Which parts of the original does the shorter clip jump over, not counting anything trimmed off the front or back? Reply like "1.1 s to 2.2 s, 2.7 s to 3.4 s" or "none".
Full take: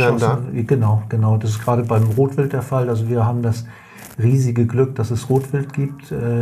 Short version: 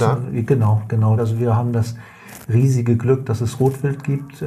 1.4 s to 2.9 s